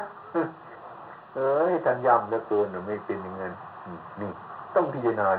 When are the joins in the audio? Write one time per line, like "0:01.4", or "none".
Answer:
none